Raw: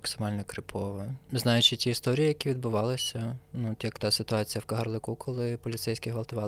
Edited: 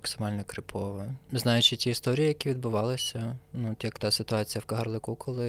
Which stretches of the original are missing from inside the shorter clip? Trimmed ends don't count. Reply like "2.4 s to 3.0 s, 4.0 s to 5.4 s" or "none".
none